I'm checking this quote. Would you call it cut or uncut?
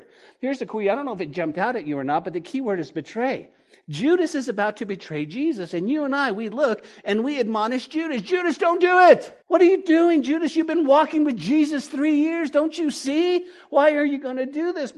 cut